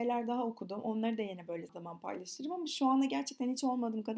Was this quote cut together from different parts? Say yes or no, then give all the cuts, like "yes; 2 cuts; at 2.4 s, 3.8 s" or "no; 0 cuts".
yes; 1 cut; at 1.7 s